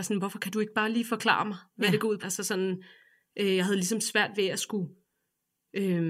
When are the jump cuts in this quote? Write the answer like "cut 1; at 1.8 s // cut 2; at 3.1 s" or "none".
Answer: cut 1; at 2.2 s